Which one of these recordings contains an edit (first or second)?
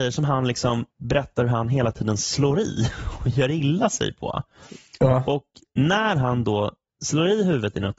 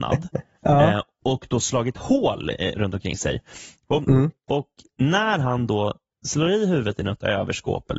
second